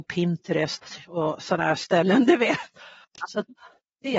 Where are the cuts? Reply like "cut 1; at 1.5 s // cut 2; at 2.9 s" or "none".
cut 1; at 3.2 s